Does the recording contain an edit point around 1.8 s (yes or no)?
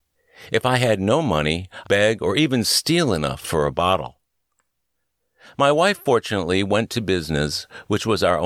yes